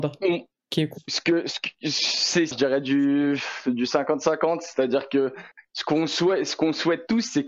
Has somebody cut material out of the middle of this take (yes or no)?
yes